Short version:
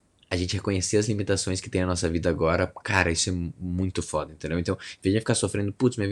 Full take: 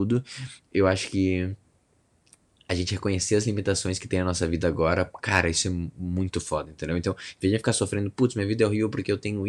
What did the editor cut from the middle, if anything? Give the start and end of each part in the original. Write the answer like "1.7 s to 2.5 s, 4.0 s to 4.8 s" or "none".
none